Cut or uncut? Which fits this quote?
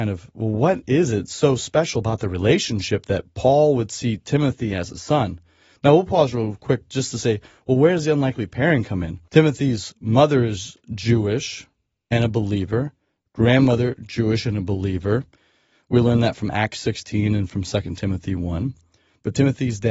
cut